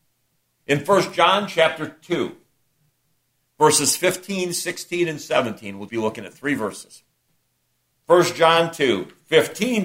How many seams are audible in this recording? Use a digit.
1